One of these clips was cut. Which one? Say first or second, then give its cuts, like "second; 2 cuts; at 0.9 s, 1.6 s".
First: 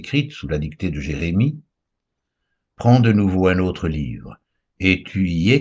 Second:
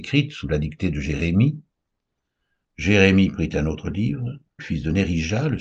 second; 2 cuts; at 2.6 s, 4.6 s